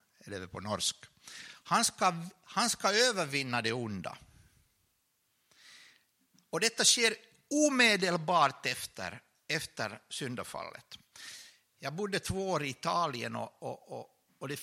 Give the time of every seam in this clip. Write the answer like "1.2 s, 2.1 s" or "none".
1.6 s